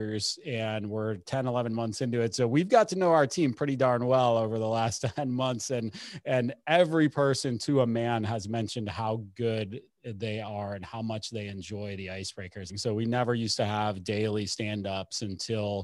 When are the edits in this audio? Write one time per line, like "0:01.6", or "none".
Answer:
0:12.7